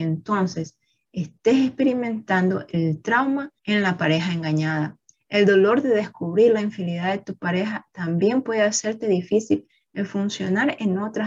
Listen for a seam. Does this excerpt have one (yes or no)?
yes